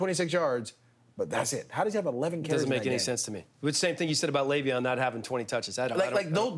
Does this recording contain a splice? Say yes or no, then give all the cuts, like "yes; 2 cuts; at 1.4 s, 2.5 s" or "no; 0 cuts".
no; 0 cuts